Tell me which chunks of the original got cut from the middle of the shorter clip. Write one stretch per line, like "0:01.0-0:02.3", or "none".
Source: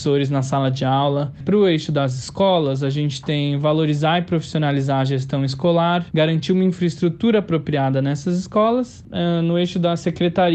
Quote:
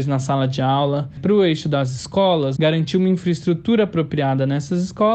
0:02.8-0:06.1